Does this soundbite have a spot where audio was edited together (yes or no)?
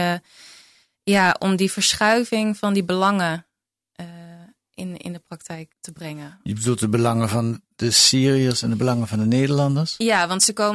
yes